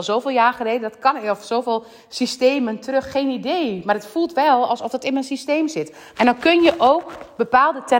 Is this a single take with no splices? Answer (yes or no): no